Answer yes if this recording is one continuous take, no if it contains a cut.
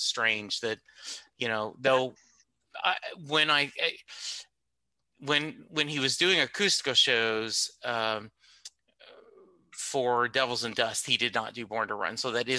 yes